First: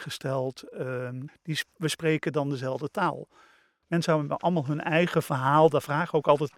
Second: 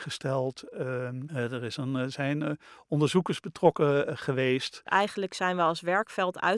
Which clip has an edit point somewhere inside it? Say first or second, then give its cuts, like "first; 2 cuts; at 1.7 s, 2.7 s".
first; 2 cuts; at 1.3 s, 3.8 s